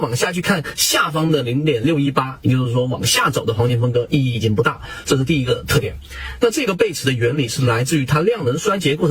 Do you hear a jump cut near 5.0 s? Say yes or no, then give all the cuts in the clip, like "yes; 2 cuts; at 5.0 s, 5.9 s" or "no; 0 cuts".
yes; 2 cuts; at 5.0 s, 6.4 s